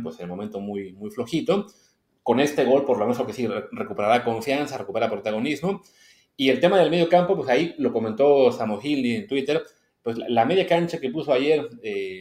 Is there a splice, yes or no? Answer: no